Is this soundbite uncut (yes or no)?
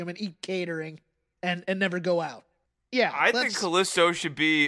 yes